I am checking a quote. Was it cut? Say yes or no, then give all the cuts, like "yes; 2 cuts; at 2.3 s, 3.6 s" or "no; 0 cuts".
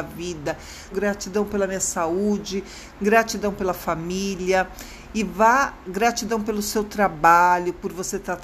yes; 1 cut; at 0.9 s